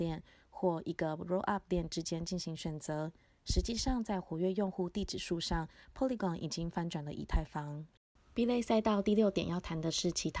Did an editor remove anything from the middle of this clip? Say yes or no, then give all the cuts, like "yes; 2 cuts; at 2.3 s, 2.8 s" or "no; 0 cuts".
no; 0 cuts